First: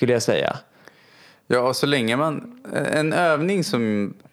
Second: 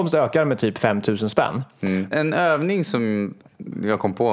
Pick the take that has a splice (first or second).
second